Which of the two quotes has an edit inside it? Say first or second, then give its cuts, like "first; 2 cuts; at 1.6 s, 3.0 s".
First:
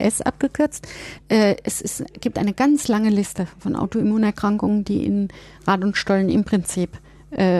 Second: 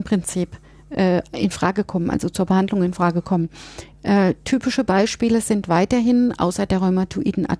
first; 1 cut; at 1.2 s